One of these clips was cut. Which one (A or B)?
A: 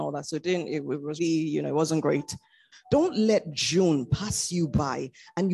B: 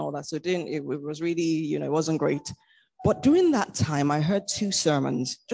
A